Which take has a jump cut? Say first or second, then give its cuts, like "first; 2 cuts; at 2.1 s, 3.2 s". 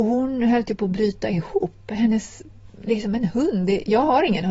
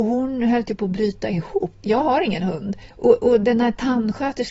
second; 2 cuts; at 1.8 s, 2.9 s